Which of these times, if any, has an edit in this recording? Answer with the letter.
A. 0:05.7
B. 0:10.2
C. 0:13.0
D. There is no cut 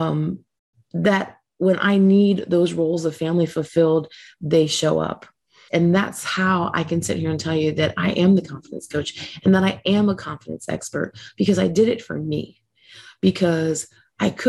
A